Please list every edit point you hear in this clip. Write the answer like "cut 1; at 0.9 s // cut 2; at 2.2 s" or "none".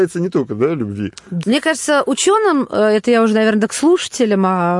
cut 1; at 1.4 s

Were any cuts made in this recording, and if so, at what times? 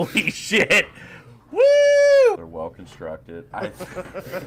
cut 1; at 2.3 s // cut 2; at 3.5 s

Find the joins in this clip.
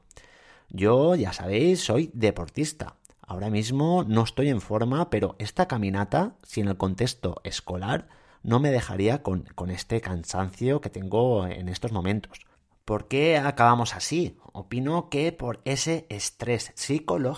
none

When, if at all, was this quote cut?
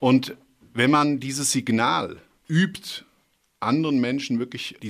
none

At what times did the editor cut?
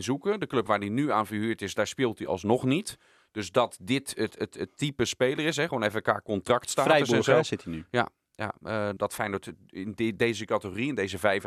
cut 1; at 9.0 s

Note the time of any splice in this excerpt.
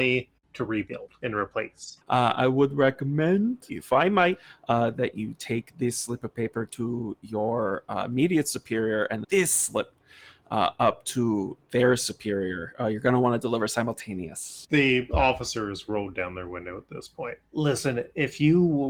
cut 1; at 2.0 s // cut 2; at 9.2 s

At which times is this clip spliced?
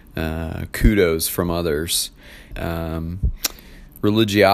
cut 1; at 2.5 s

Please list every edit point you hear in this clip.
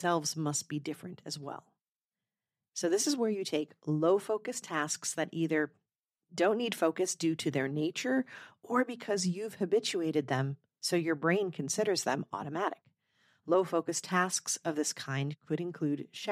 none

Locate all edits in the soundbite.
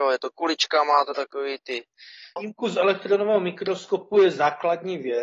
cut 1; at 2.4 s

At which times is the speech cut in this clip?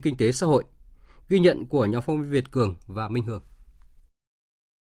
none

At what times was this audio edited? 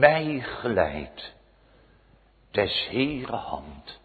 none

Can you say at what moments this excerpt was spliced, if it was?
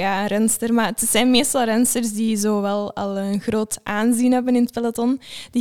none

